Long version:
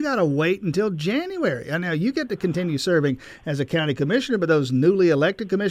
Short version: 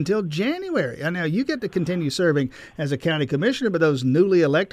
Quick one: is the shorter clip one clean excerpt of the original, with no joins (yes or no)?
yes